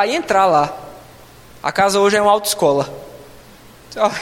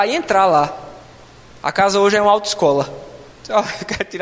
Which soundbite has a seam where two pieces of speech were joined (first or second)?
second